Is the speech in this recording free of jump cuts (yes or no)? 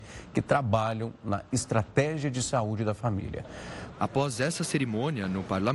no